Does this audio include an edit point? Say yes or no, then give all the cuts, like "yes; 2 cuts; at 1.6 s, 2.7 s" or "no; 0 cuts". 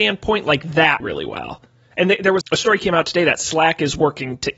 yes; 2 cuts; at 1.0 s, 2.4 s